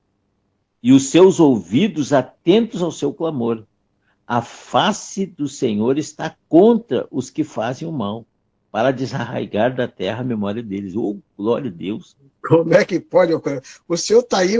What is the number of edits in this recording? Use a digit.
0